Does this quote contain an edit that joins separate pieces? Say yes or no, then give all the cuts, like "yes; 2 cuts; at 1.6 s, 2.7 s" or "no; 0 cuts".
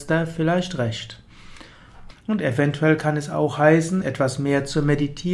yes; 2 cuts; at 2.1 s, 4.0 s